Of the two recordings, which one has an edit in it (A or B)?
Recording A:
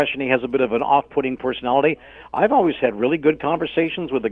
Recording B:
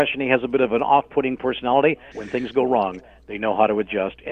B